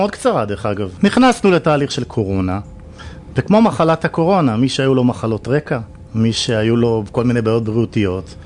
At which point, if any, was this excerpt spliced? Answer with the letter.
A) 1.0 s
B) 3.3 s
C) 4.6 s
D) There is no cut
A